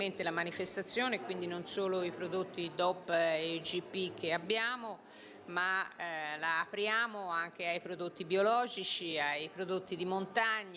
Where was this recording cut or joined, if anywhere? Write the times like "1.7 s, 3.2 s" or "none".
none